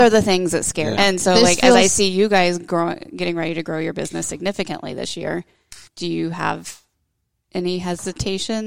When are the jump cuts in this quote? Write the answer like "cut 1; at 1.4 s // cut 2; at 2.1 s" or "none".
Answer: cut 1; at 1.0 s // cut 2; at 5.9 s